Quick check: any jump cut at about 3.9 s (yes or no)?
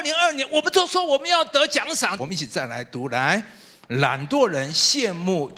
no